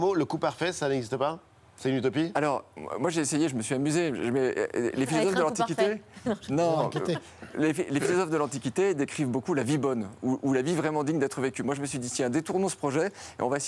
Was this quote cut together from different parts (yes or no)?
no